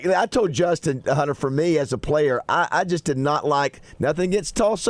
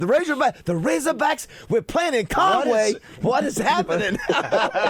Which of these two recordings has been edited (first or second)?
second